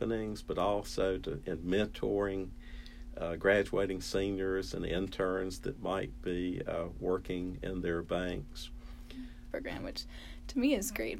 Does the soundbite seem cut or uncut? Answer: cut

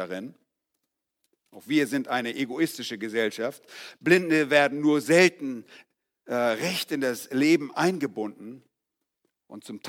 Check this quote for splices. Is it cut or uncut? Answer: uncut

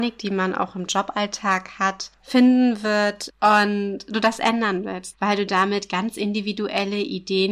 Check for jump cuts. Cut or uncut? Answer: cut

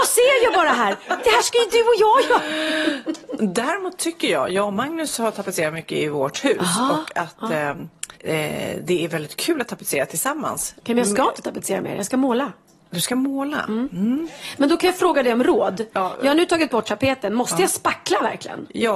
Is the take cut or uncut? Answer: cut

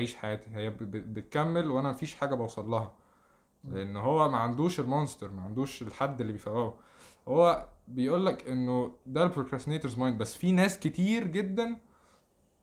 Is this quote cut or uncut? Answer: uncut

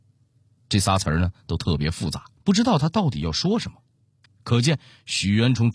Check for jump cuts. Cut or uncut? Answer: cut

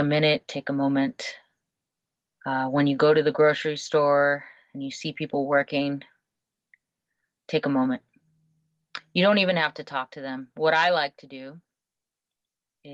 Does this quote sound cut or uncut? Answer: uncut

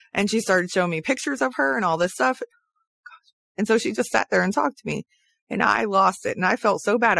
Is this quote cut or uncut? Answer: uncut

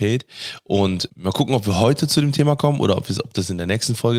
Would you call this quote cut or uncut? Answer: cut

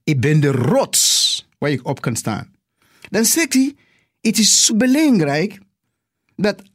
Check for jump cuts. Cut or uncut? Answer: cut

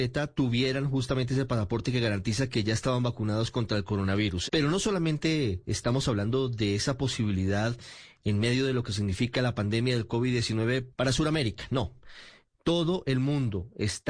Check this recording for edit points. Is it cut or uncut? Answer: cut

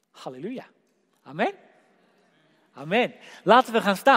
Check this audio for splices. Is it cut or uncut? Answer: uncut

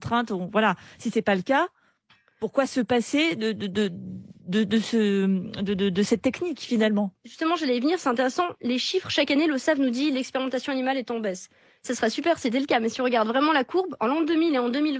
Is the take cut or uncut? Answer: uncut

